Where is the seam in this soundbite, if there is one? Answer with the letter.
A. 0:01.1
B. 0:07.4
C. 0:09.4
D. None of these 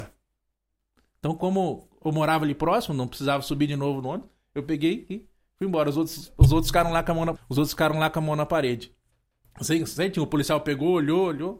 B